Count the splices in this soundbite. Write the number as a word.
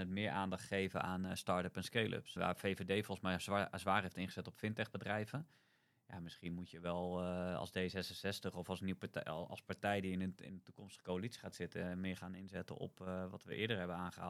one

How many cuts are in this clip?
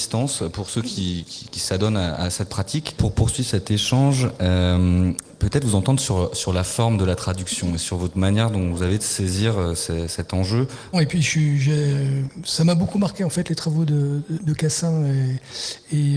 two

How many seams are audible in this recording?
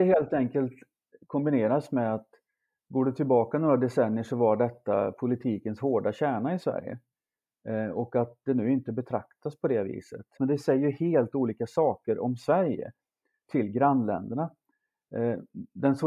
one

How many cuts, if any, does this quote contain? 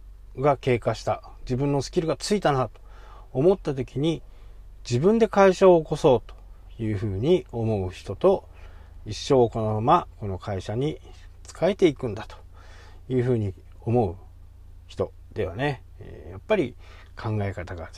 one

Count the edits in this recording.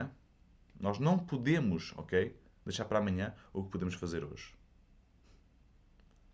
zero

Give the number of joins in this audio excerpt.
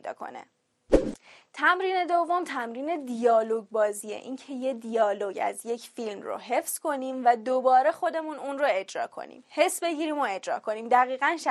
zero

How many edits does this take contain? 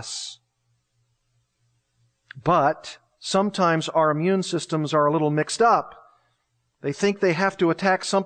zero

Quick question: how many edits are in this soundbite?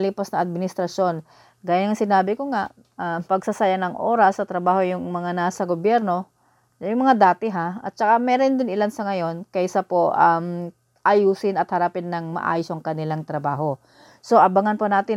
one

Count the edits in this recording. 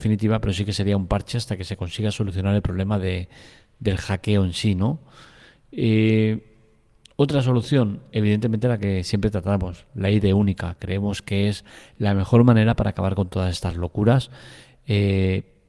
zero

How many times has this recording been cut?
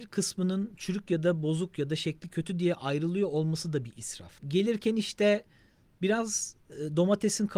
one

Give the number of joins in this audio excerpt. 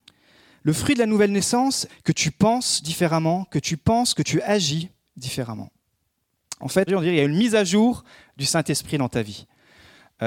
two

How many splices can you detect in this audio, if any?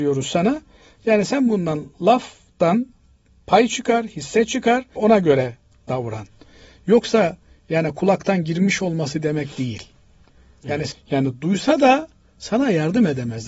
two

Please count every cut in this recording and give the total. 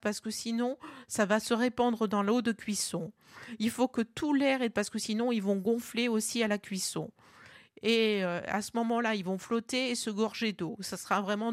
one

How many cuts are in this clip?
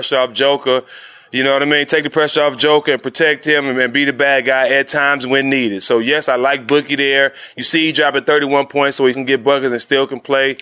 one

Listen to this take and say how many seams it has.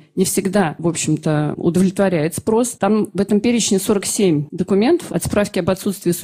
two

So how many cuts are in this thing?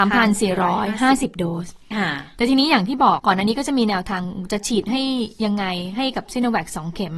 one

